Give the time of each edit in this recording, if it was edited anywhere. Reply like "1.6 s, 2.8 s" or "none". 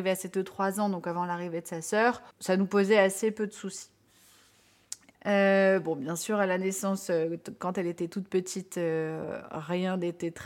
2.3 s, 5.1 s

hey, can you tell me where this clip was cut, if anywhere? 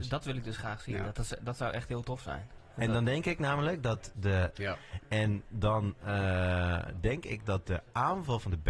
4.5 s

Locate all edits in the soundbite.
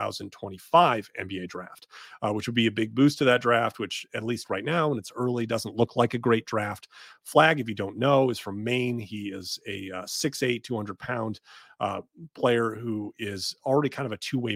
none

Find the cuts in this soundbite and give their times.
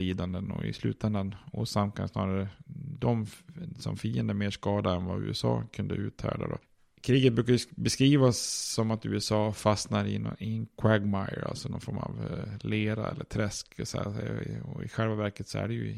none

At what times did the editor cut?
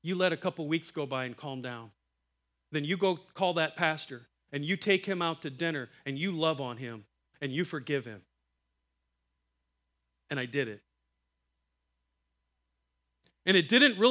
none

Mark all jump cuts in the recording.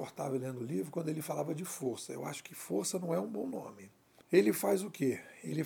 4.2 s

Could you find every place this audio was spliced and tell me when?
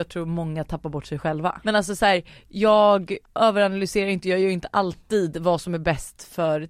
1.6 s, 3.2 s

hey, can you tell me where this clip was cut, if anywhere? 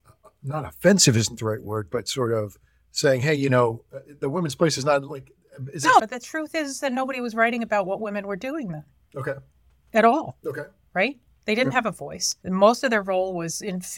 6.0 s, 12.4 s

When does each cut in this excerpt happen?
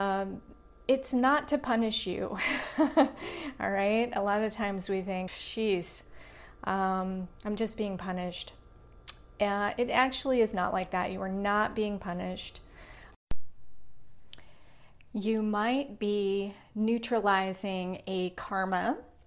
5.3 s

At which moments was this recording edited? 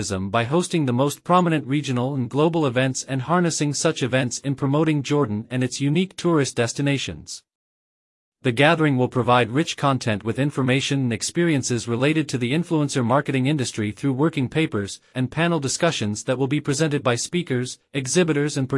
15.1 s

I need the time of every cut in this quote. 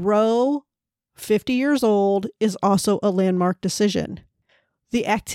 none

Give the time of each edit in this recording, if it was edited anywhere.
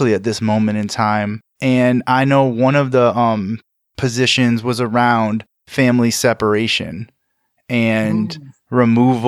1.5 s

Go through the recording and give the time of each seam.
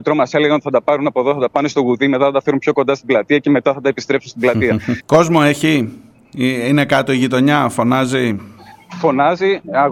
5.0 s

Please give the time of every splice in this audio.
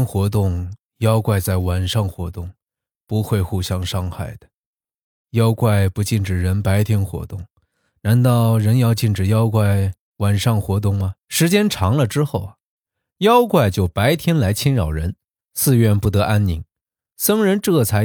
5.2 s, 11.2 s

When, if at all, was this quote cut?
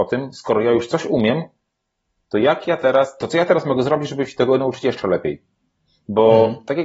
none

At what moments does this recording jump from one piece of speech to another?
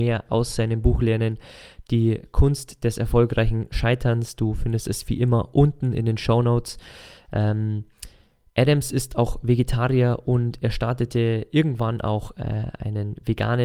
none

